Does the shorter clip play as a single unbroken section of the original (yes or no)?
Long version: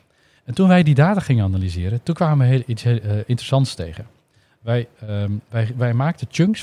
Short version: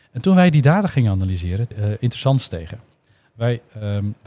no